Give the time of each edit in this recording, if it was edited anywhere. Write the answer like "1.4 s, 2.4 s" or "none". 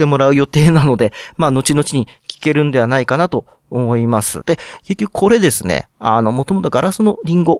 4.4 s